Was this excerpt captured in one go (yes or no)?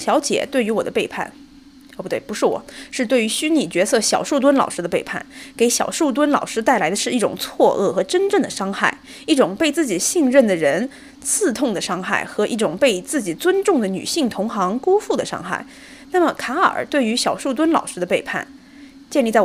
yes